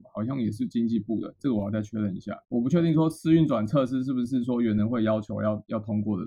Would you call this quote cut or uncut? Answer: uncut